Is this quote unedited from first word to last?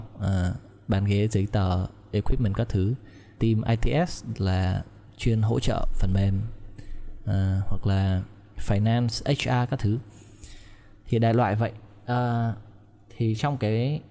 no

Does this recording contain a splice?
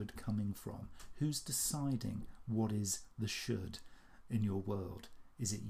no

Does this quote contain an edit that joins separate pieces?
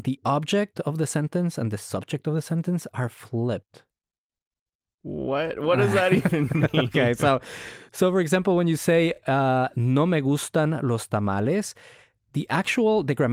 no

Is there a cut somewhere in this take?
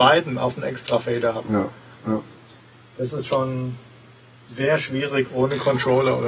no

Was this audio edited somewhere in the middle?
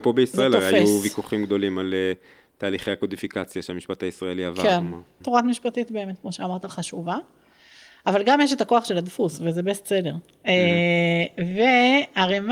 yes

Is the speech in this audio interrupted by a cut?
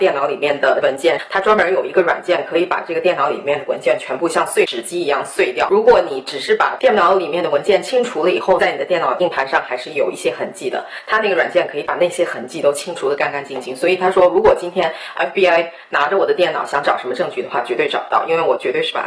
no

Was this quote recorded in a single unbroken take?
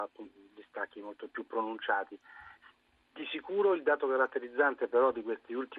yes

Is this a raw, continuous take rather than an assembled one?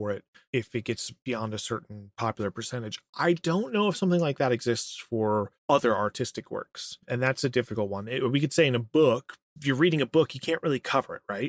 yes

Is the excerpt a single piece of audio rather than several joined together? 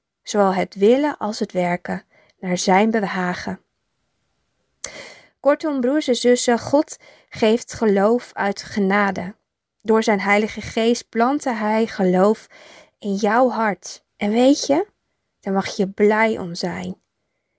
no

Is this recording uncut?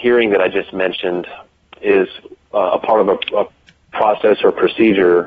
yes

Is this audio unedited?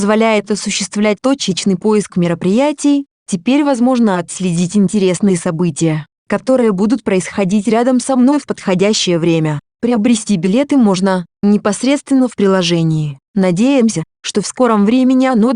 no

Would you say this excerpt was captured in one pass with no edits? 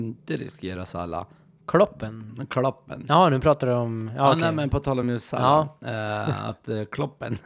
yes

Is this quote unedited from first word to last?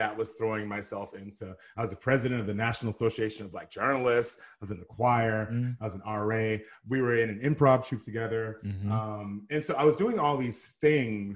yes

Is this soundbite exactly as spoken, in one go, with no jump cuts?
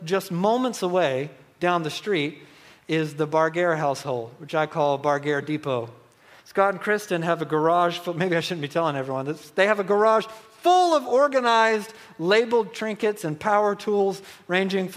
yes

